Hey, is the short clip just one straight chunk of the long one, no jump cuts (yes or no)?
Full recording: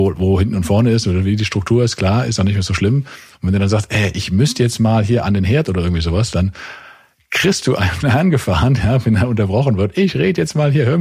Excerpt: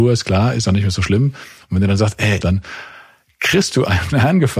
no